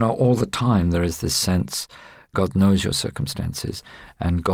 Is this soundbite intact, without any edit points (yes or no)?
no